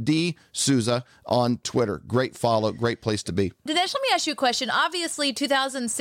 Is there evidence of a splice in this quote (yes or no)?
no